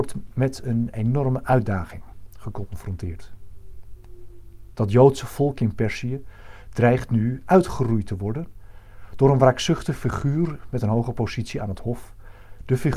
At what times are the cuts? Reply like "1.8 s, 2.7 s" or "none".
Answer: 4.7 s